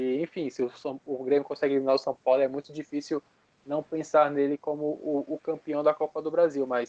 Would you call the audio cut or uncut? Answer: uncut